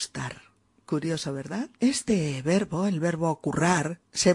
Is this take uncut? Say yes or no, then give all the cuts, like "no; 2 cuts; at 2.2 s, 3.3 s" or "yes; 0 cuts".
no; 1 cut; at 1.8 s